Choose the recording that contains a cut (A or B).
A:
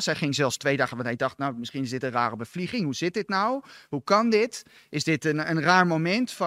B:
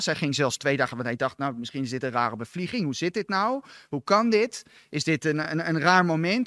A